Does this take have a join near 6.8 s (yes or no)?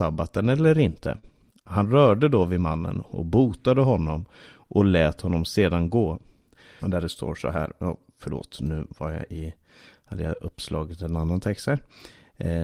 yes